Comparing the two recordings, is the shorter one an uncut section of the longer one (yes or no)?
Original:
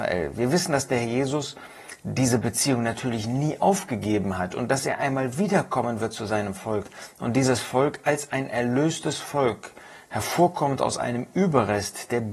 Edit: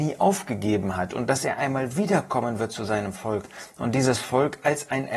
yes